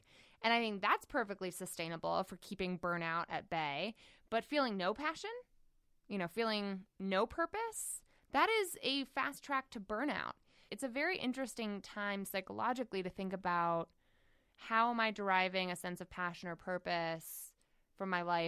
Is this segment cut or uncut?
cut